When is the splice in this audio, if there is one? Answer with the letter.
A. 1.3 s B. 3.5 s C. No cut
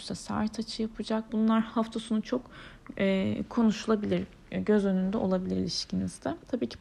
A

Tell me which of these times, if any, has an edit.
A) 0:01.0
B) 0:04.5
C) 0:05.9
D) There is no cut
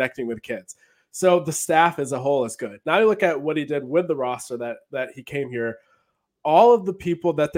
D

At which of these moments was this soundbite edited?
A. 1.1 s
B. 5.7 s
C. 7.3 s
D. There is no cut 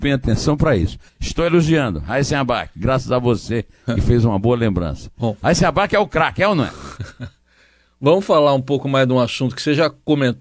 A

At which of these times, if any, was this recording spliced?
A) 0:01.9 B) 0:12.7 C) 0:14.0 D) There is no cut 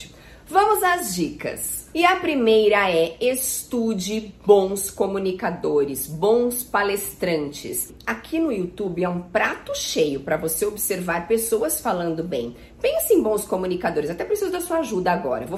D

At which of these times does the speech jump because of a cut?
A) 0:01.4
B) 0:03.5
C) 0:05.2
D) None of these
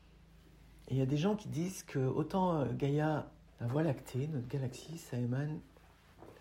B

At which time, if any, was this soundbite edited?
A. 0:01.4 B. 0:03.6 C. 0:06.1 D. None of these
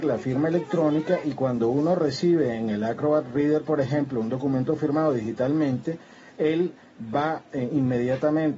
D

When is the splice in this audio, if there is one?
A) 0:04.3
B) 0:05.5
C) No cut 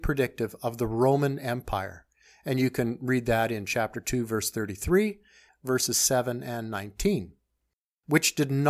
B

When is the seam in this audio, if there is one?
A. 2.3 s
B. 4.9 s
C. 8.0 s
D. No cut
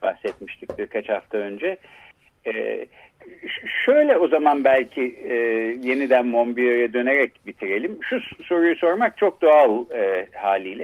D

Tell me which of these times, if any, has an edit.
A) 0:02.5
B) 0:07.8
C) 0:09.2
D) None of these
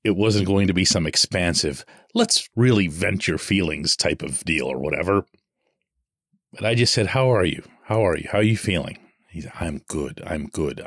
A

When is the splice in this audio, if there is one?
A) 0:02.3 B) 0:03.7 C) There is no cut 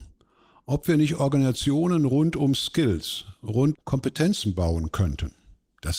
B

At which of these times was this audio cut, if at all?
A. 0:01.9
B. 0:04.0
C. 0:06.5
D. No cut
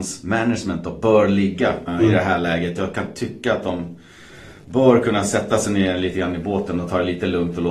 A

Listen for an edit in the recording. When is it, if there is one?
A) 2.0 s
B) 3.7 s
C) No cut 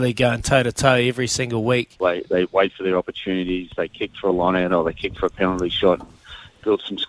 A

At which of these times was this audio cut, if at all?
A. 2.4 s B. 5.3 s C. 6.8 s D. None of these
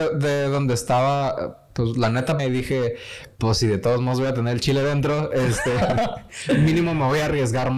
A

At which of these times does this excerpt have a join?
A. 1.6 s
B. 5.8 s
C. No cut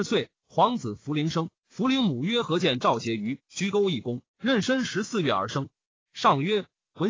A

